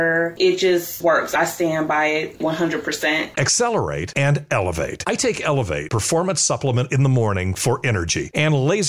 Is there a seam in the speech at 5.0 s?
no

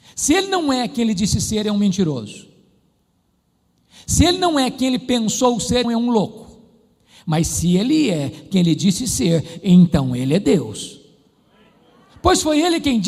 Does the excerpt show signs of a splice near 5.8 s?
yes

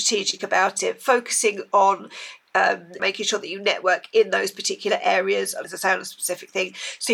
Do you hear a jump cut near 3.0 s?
yes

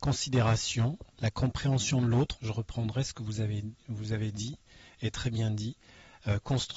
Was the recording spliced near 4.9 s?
no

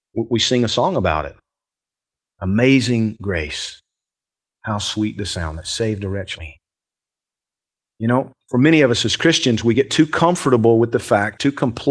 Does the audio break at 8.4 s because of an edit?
yes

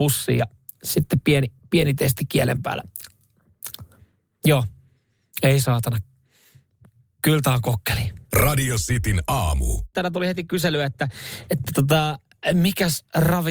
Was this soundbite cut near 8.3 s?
yes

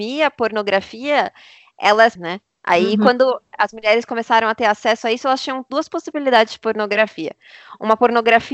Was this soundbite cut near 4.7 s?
no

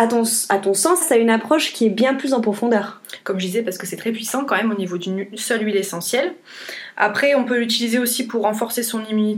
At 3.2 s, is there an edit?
yes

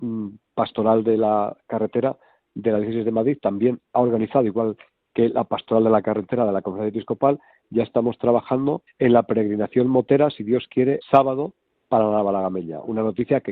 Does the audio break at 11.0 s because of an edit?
yes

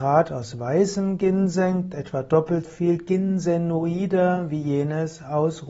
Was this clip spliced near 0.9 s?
no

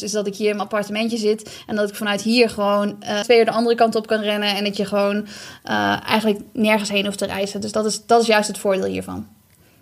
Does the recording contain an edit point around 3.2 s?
yes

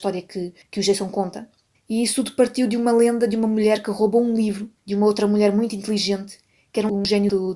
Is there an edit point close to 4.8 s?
yes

